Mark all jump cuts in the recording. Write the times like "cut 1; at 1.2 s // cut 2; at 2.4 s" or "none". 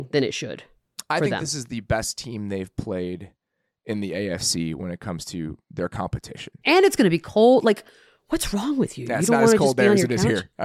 cut 1; at 6.6 s